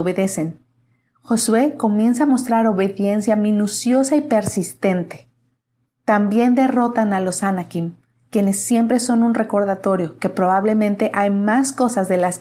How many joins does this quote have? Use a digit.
0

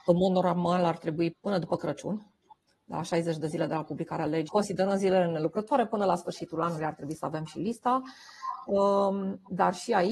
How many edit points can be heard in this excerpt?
2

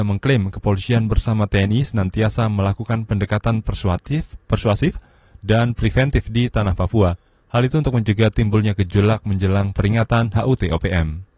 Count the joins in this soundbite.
0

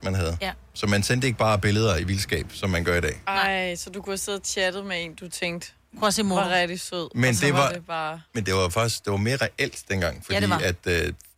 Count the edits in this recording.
0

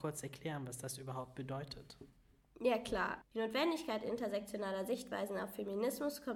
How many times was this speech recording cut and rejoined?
1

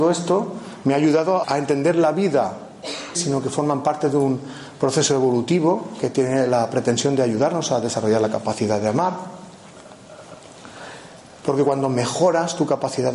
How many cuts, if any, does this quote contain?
3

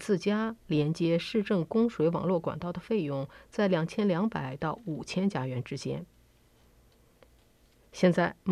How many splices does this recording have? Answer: 0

